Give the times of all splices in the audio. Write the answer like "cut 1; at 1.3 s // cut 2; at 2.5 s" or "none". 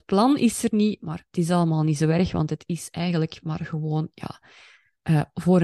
cut 1; at 1.0 s